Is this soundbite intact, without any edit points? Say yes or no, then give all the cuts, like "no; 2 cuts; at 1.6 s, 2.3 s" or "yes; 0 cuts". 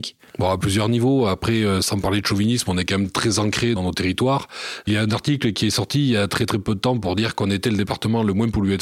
yes; 0 cuts